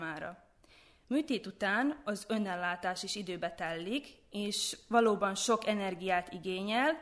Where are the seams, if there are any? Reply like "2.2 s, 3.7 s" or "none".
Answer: none